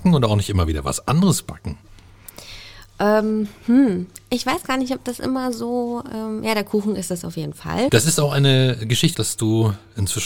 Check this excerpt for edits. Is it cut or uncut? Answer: cut